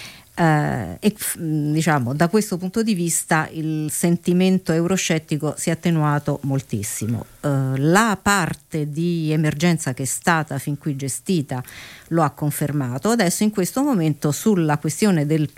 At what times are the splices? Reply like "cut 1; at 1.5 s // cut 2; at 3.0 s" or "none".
cut 1; at 1.1 s